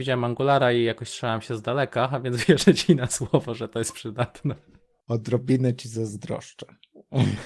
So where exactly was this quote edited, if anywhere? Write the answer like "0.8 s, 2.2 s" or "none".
none